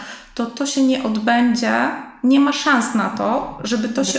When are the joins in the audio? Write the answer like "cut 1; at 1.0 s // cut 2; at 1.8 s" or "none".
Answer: none